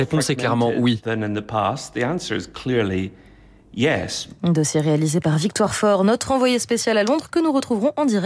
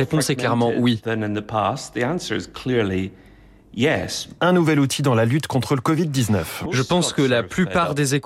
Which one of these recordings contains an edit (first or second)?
second